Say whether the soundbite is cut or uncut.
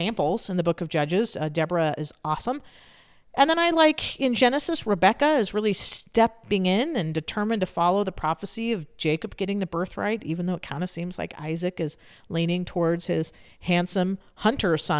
uncut